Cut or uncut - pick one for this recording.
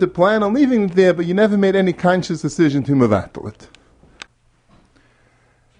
uncut